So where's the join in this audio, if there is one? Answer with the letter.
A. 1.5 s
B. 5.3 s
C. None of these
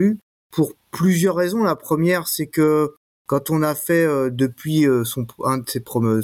C